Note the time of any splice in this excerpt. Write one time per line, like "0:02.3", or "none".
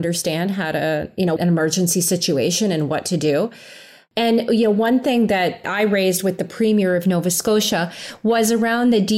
0:01.4